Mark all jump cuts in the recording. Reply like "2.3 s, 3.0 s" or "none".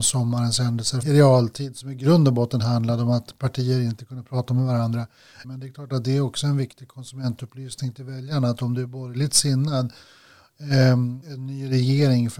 1.0 s, 5.4 s, 11.2 s